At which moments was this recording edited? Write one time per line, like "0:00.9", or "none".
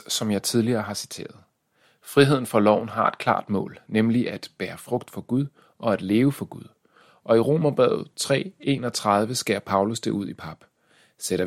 none

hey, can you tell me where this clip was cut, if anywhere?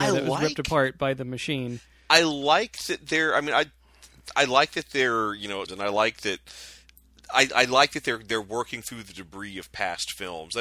0:05.7

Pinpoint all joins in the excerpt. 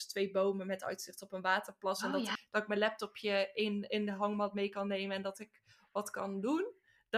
0:02.4

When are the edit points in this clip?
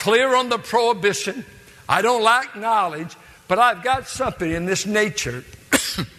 none

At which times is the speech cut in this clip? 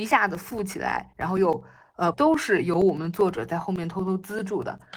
0:02.1

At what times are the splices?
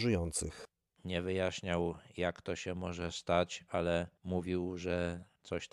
0:01.0

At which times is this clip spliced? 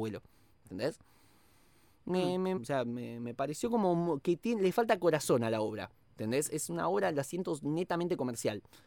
0:02.6

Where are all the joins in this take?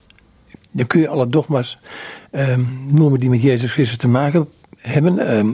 none

